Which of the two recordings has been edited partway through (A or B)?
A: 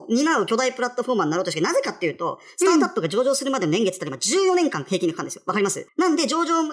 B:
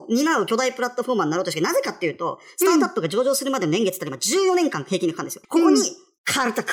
B